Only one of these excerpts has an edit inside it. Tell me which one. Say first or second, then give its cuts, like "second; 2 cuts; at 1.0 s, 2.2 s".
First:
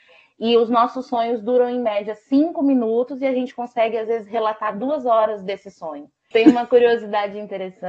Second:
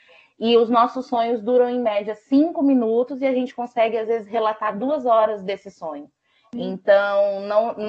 first; 1 cut; at 6.3 s